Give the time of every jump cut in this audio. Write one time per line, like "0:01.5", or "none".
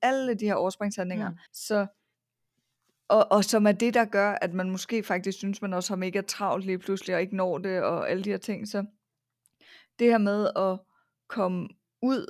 0:01.5